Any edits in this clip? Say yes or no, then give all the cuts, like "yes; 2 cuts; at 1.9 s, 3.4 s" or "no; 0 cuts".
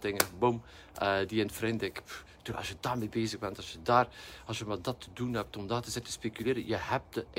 no; 0 cuts